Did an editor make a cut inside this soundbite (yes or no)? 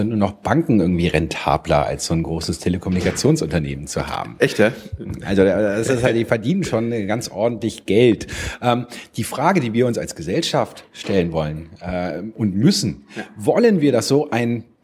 no